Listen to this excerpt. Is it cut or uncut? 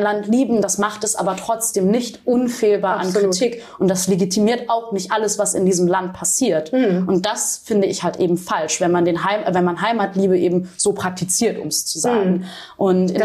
uncut